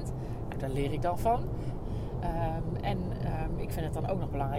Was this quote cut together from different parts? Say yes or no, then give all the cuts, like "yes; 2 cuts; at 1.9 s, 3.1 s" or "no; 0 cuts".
yes; 1 cut; at 1.8 s